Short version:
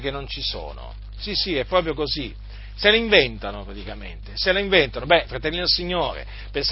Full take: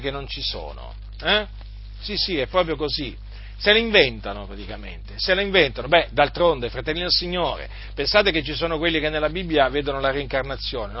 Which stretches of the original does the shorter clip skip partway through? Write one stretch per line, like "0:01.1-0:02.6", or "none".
0:01.2-0:02.0
0:06.1-0:06.7